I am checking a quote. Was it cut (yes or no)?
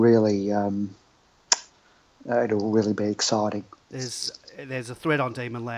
yes